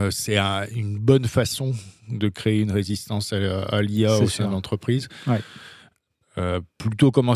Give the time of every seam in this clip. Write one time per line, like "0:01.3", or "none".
none

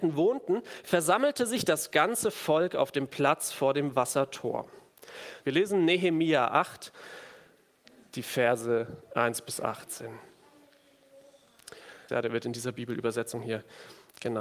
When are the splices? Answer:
0:05.4
0:12.1

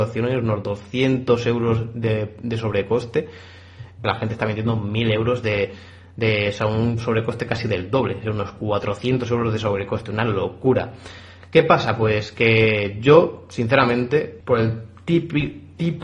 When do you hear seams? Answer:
0:04.0
0:14.4

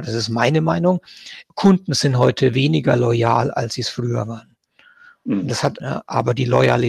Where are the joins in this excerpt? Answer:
0:01.4
0:05.8

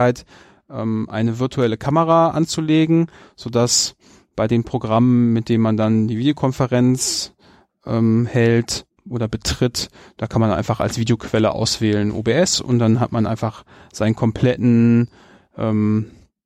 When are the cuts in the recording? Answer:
none

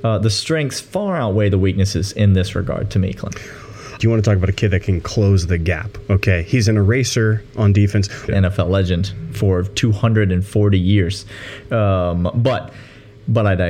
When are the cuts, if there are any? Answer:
0:04.0
0:08.3

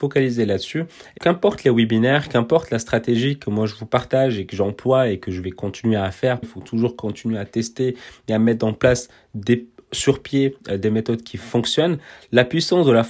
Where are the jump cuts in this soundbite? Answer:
0:01.2
0:06.4

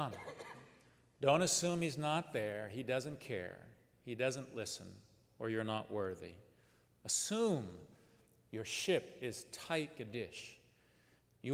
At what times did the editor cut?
0:10.0

